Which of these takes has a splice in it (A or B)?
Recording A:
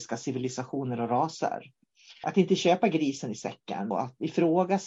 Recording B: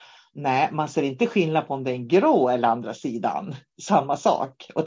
A